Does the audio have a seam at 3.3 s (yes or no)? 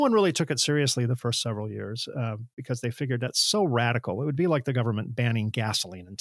no